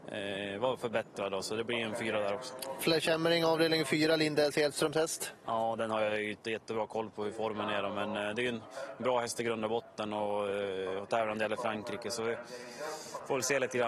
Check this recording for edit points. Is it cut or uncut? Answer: uncut